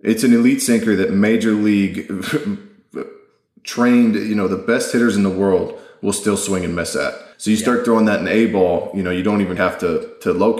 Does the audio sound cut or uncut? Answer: cut